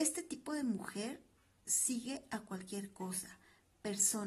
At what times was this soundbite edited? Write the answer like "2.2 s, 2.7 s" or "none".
none